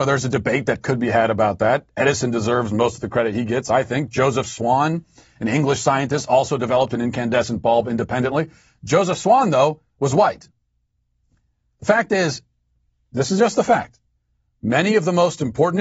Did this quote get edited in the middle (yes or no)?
no